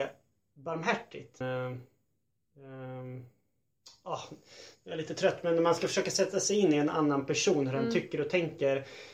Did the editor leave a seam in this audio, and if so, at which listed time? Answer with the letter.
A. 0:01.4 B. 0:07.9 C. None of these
A